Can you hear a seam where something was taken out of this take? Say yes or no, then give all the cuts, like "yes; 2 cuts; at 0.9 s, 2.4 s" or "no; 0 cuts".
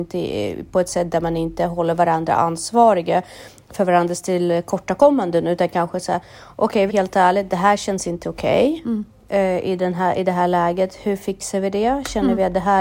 yes; 1 cut; at 6.9 s